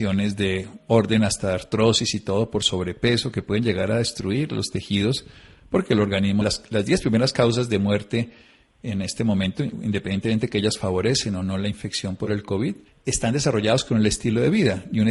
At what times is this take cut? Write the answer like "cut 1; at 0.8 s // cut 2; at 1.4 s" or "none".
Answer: cut 1; at 6.4 s // cut 2; at 12.9 s